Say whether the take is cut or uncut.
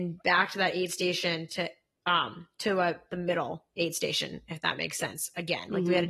uncut